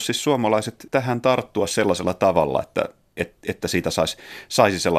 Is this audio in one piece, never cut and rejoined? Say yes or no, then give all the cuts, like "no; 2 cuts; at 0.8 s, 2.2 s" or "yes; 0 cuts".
yes; 0 cuts